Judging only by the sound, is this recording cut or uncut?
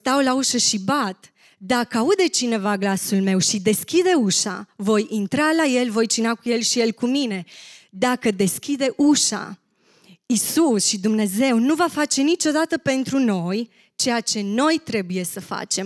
uncut